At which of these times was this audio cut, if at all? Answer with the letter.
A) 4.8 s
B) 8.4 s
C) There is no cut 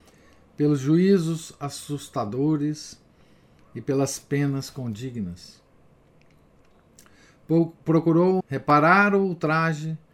B